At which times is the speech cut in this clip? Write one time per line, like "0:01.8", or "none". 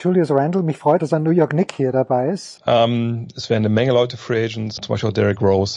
0:01.0
0:02.6
0:04.8

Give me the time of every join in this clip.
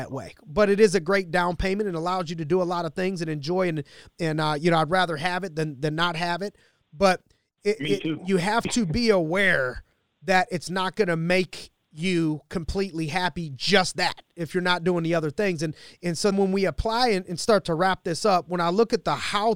0:16.3

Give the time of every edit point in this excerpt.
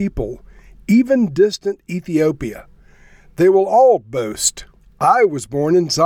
none

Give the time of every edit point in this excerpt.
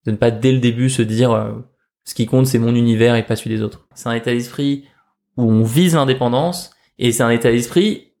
0:03.9

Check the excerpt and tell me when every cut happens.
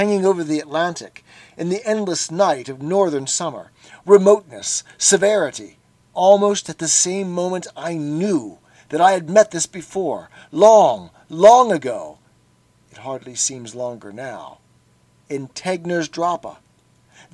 none

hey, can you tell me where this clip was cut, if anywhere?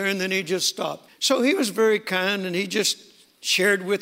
0:01.1

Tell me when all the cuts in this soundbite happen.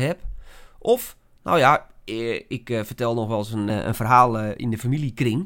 0:03.7

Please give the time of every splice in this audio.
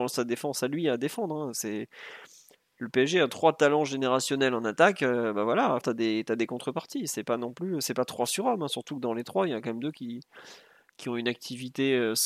0:05.8

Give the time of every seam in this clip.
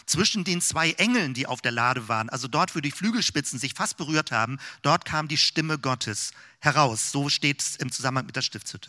none

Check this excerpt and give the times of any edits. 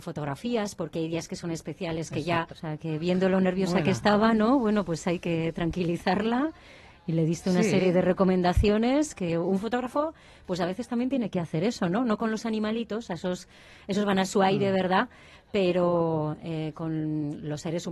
0:02.5

